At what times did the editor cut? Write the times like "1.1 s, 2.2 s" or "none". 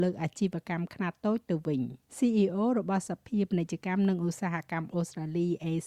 2.1 s